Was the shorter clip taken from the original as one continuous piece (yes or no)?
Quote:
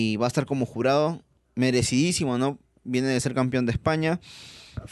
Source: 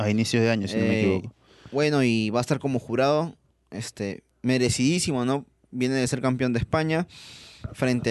no